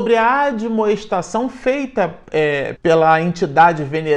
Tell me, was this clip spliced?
yes; 1 cut; at 2.8 s

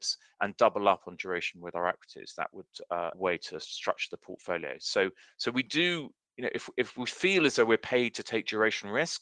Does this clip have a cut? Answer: yes; 1 cut; at 3.1 s

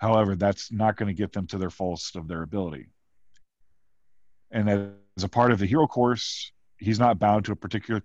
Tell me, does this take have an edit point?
no; 0 cuts

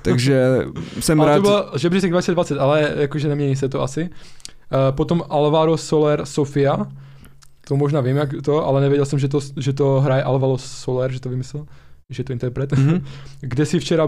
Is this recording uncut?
yes; 0 cuts

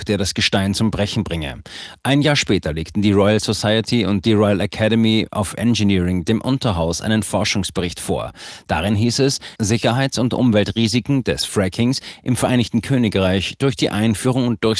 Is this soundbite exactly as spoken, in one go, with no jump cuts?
no; 1 cut; at 9.6 s

